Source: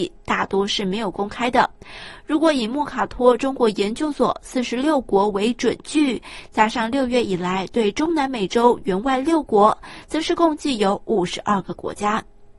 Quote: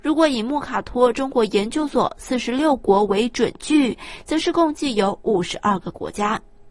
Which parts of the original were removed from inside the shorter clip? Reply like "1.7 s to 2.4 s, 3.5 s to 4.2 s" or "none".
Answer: 6.5 s to 10.0 s